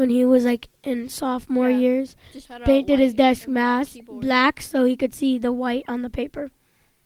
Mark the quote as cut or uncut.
uncut